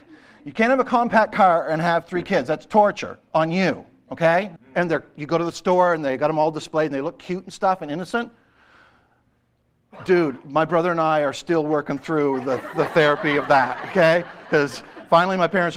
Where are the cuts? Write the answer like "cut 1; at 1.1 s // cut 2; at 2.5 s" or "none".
cut 1; at 4.6 s